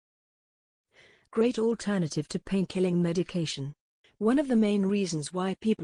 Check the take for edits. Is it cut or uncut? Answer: cut